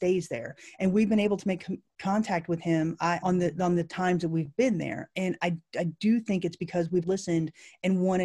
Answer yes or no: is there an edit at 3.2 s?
yes